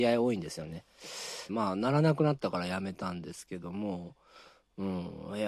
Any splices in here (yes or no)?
yes